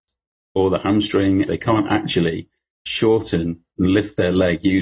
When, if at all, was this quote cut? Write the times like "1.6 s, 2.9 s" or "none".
1.5 s